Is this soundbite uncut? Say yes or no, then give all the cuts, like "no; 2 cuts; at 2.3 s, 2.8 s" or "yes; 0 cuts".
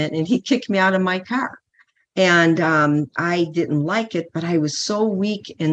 yes; 0 cuts